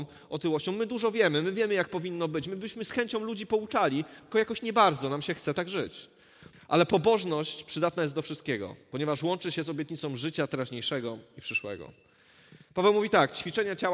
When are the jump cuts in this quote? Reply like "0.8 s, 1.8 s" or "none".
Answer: 6.5 s